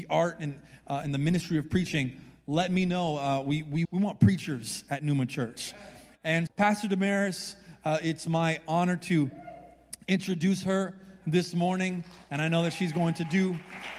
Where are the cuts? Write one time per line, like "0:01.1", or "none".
0:03.8
0:06.5